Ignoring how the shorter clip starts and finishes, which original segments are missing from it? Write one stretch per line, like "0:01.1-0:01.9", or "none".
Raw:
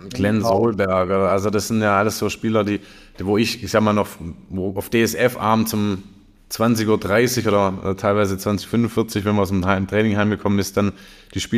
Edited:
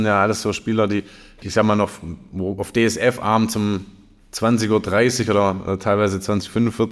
0:03.2-0:03.6